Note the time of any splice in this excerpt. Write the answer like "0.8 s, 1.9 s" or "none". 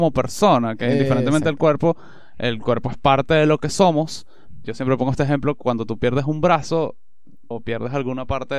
4.6 s, 7.5 s